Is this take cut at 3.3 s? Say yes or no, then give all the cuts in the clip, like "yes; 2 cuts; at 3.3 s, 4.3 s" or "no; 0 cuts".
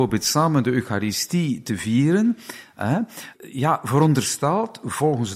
yes; 1 cut; at 3.3 s